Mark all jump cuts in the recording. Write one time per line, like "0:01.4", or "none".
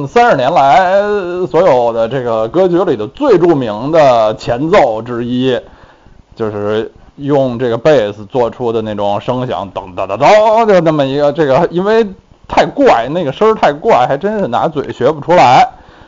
none

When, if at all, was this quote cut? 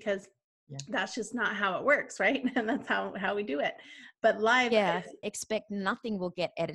0:04.1
0:05.2

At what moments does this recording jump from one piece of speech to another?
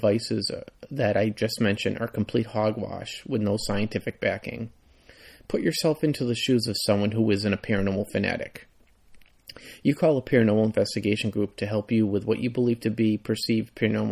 none

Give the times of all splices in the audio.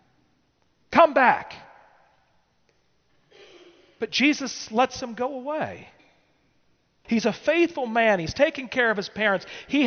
0:07.0

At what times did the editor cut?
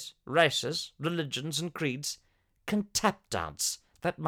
none

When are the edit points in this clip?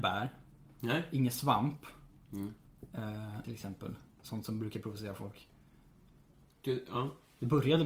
0:03.4
0:06.4

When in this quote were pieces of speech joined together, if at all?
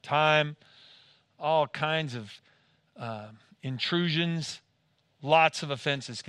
none

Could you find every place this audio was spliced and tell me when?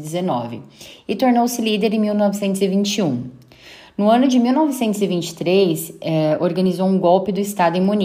none

